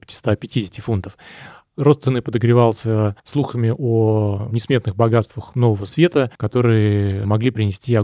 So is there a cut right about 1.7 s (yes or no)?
no